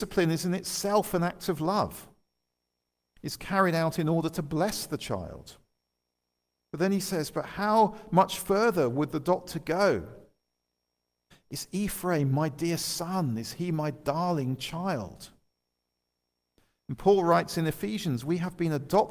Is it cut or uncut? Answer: cut